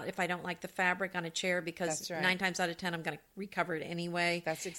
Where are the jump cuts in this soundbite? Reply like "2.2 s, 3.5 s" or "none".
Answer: none